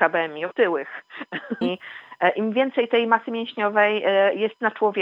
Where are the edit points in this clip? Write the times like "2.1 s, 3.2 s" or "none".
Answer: 1.6 s